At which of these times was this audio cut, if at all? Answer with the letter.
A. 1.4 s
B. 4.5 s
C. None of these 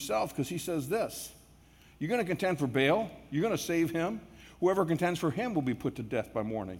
C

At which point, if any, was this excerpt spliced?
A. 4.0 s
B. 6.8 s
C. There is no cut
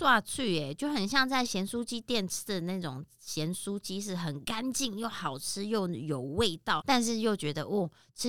B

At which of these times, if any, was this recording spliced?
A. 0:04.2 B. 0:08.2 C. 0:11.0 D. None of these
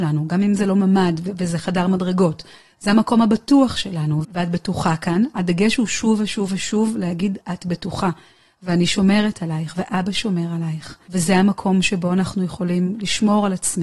A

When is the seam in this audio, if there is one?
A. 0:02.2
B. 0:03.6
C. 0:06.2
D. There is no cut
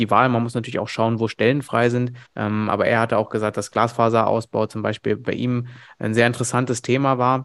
A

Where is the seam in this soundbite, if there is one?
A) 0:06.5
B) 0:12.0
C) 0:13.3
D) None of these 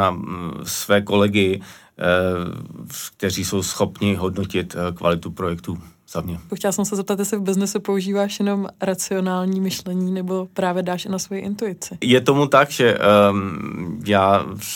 A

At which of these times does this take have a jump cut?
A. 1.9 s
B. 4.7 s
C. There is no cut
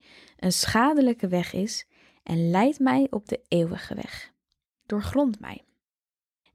B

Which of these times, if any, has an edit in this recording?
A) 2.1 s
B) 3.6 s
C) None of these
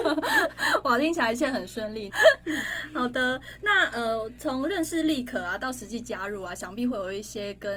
A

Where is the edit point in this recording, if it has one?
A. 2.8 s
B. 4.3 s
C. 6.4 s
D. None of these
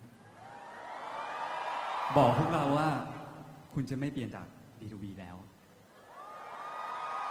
B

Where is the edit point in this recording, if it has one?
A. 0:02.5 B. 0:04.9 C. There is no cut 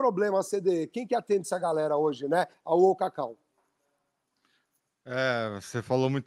A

